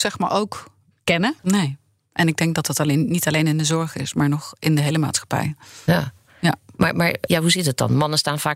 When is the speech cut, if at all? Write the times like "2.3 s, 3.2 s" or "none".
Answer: 1.4 s, 7.3 s